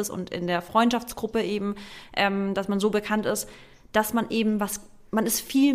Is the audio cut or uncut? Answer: uncut